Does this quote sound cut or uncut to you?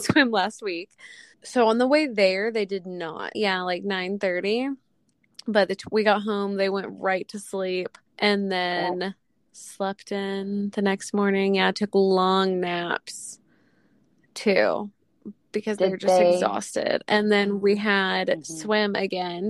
cut